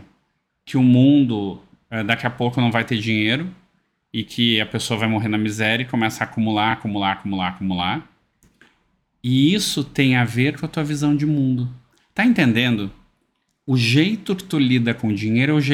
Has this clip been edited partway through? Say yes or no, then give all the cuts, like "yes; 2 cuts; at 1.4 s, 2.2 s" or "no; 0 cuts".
no; 0 cuts